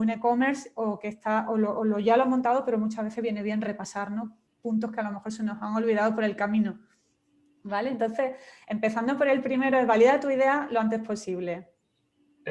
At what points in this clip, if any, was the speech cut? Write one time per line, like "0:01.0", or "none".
none